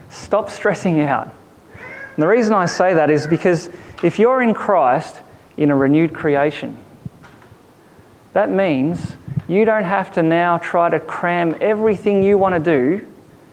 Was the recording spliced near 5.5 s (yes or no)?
yes